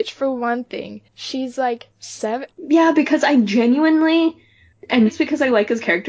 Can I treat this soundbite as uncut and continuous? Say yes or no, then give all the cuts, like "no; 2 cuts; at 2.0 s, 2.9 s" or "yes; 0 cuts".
no; 2 cuts; at 2.5 s, 5.1 s